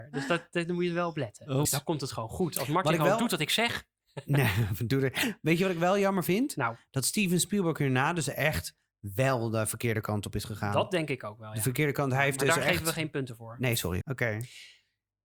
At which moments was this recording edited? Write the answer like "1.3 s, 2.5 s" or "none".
1.7 s, 14.0 s